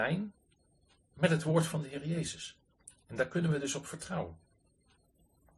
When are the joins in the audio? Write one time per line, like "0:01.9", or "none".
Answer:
none